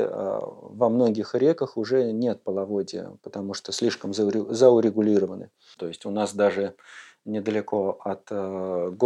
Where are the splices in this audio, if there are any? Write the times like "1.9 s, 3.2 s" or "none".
5.8 s